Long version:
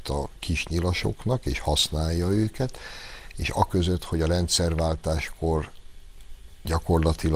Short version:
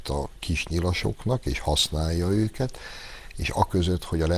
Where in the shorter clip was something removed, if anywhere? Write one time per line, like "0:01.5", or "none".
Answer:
none